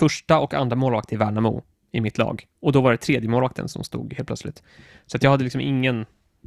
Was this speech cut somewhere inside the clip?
yes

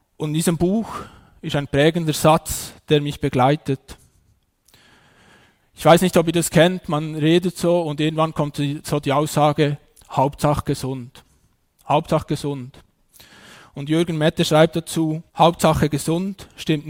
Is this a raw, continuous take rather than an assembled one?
no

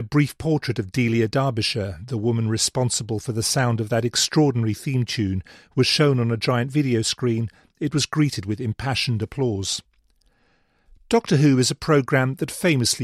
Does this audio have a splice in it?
no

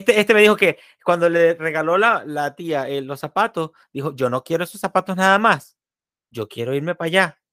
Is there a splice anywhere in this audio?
no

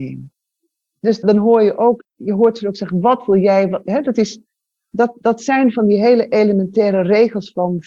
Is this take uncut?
yes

